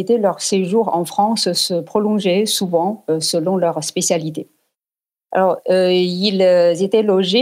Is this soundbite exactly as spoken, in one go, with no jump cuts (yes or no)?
yes